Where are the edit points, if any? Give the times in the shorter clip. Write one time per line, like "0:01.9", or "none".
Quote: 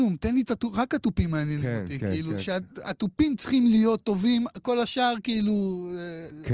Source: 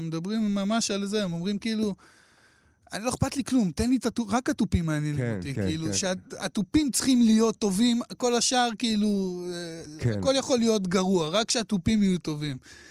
none